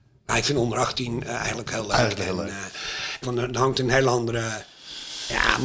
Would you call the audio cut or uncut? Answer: cut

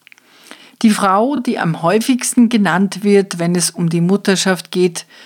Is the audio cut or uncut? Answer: uncut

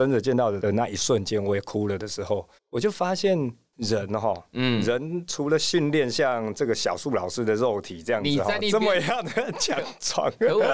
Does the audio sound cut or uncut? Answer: cut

